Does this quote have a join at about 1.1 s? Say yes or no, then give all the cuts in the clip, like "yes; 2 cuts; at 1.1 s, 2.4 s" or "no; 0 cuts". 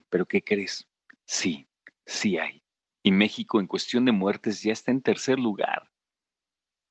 no; 1 cut; at 2.9 s